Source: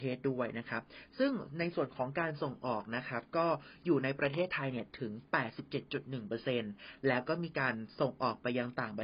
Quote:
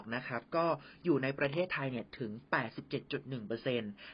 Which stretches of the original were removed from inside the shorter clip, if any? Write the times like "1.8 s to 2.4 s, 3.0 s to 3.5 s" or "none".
none